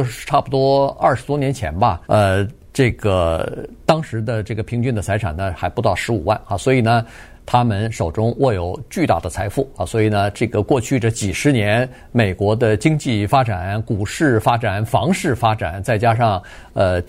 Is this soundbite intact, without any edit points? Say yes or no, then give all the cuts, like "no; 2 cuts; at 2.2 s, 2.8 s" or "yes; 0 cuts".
no; 3 cuts; at 2.0 s, 7.3 s, 10.3 s